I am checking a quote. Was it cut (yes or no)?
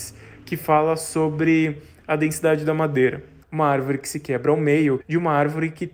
yes